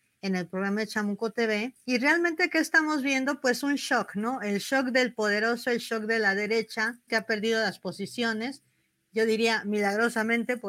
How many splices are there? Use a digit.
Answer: 1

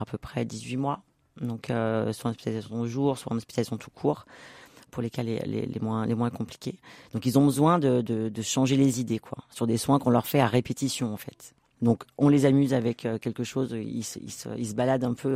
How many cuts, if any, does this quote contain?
0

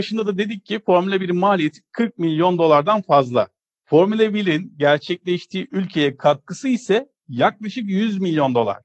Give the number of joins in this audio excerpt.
0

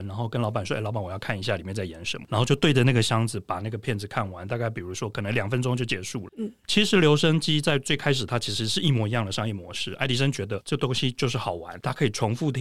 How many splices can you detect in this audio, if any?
0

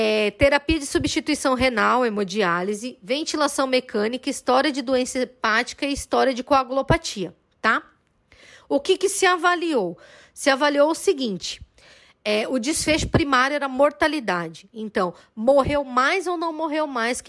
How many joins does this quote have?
0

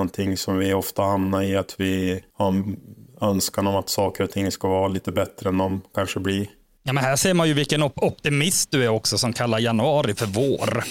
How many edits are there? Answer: 1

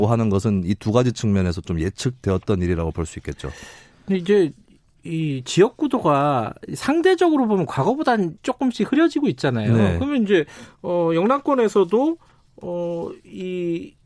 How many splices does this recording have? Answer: 1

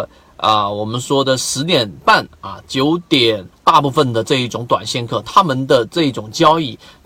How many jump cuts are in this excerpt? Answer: 1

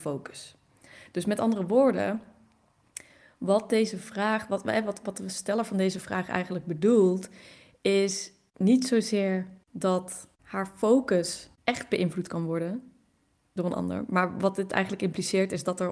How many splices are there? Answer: 0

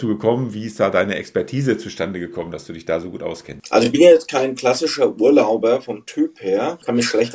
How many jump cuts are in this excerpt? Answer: 0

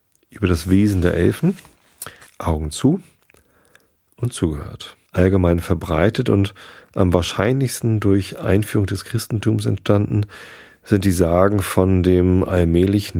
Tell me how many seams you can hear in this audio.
2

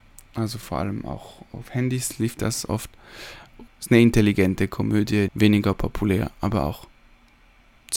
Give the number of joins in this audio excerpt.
2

